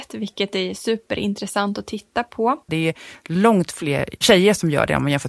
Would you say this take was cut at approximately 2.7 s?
yes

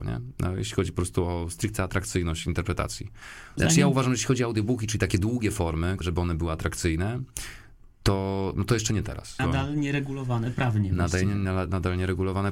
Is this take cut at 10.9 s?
no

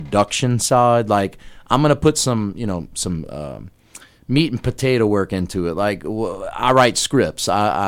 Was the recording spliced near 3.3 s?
no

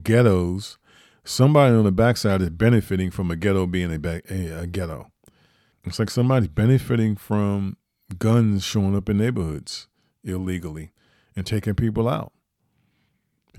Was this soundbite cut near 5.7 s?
yes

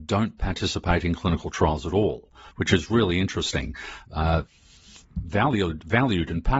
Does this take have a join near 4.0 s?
yes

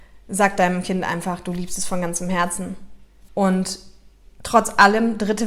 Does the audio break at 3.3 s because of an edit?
yes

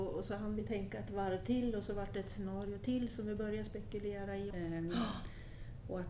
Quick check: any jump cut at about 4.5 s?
yes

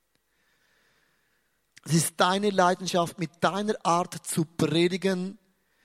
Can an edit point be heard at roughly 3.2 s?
no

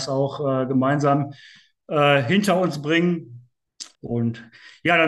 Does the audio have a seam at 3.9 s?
yes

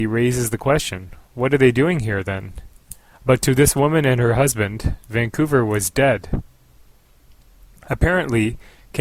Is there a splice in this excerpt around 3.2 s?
yes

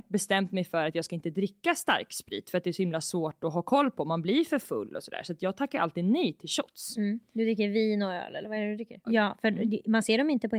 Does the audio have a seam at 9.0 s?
yes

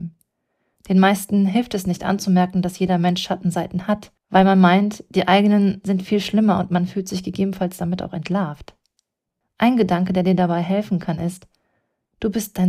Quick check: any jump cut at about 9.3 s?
no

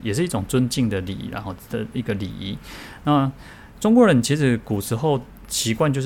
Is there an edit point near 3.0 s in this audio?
no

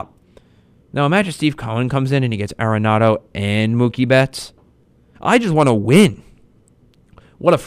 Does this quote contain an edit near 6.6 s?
no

